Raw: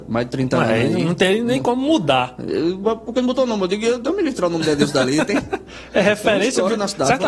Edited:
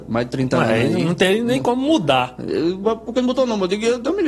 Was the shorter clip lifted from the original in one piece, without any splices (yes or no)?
yes